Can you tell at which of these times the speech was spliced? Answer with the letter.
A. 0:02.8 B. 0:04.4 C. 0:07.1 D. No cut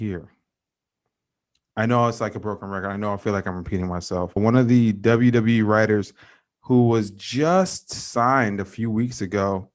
B